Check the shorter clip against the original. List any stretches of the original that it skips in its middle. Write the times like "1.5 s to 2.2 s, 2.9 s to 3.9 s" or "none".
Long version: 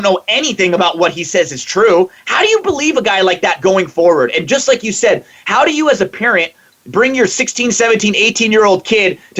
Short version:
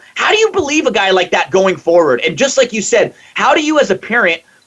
none